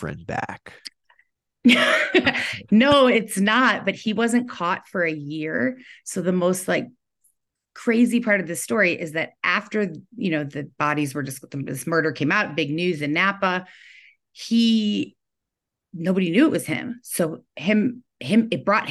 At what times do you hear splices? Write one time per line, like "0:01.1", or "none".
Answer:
none